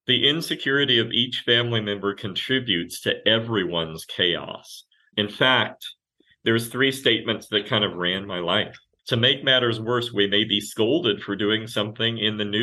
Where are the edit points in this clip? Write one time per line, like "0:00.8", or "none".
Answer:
0:05.1
0:09.0